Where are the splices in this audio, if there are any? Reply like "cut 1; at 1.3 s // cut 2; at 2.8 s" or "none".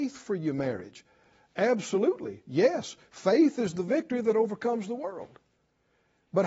none